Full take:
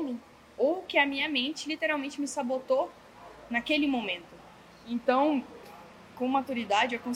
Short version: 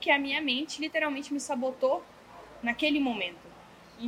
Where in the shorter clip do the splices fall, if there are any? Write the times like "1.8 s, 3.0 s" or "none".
none

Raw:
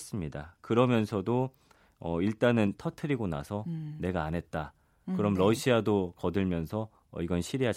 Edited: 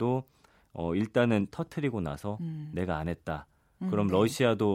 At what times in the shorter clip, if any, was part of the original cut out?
none

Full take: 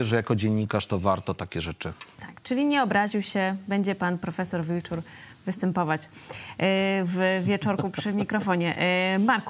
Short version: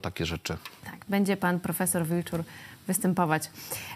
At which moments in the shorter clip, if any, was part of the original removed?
1.1 s

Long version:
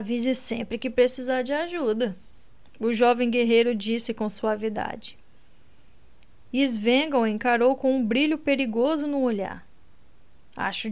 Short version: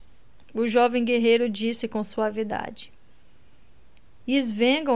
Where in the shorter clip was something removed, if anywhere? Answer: none

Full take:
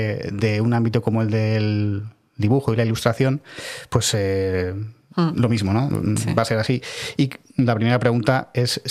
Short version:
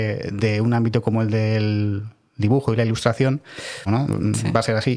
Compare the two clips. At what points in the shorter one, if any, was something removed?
3.9 s

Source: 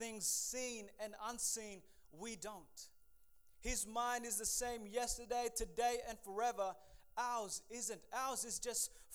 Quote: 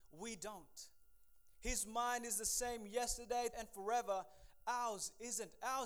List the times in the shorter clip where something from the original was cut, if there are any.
3.5 s

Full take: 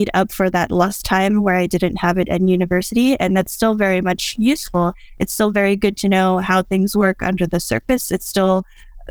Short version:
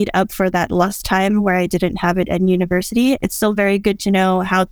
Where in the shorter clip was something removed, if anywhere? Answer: 3.2 s

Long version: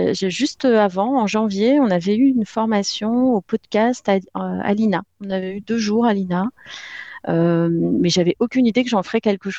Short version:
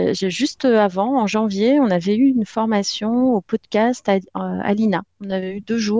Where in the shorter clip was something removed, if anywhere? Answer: none

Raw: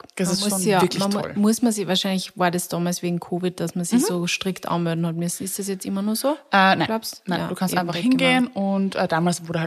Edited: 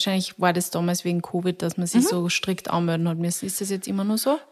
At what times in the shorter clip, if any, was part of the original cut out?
none

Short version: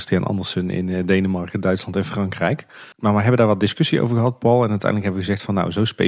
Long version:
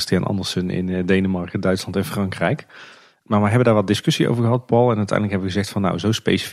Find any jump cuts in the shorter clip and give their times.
2.9 s

